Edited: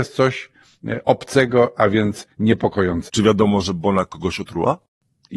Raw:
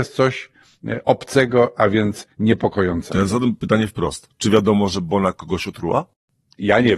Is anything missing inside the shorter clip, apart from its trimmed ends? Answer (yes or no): yes